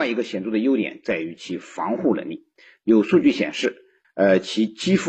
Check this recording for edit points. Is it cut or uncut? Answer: cut